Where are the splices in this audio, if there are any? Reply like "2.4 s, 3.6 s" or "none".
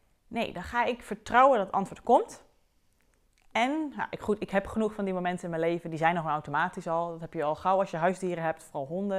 none